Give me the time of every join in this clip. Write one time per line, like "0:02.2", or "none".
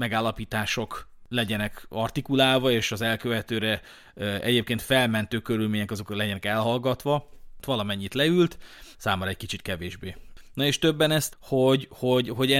0:07.6
0:08.9
0:11.3